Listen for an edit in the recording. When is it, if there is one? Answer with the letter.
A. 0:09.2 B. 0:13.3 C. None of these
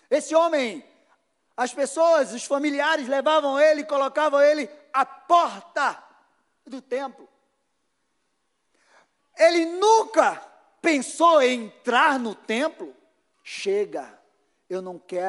B